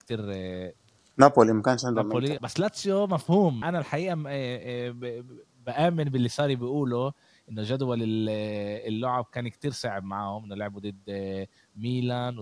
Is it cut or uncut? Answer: cut